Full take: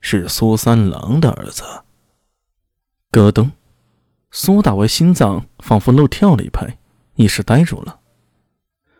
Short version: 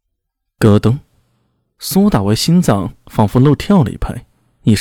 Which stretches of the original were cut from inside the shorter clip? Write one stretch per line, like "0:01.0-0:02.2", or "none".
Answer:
none